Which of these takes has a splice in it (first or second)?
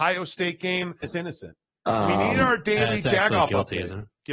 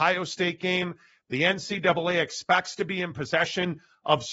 first